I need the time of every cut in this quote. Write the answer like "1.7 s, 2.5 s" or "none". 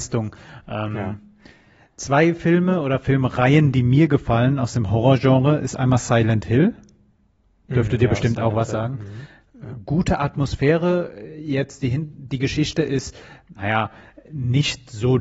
none

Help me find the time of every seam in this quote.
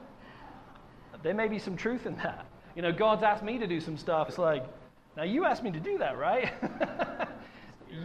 4.3 s

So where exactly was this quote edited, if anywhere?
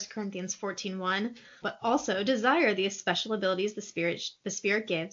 1.6 s

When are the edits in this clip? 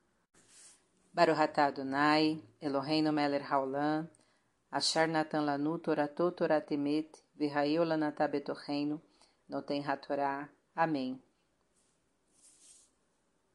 9.4 s

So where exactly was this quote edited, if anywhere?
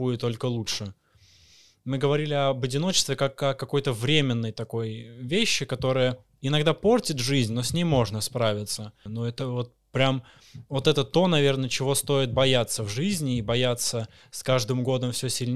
9.1 s

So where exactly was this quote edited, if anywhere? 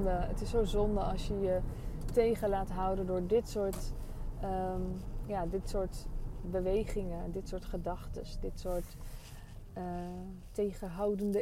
none

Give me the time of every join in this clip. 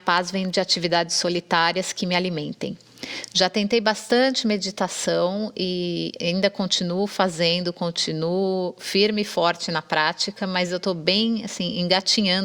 none

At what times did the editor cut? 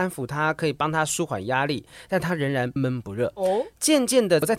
2.8 s

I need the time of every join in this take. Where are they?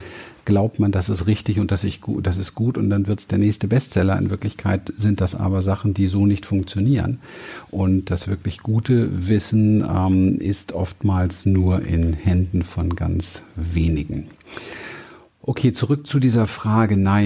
none

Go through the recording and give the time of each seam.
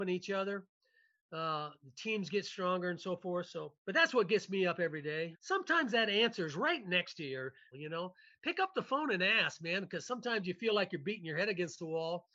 3.8 s, 5.3 s, 7.7 s

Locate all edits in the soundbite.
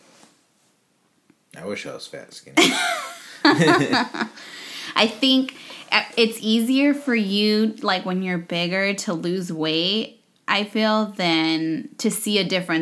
none

